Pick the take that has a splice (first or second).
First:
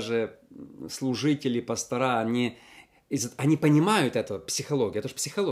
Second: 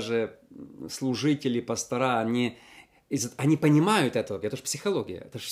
second